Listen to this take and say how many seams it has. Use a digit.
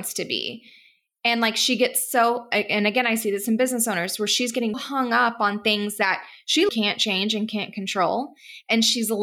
2